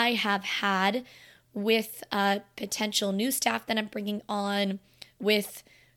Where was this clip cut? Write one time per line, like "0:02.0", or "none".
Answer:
none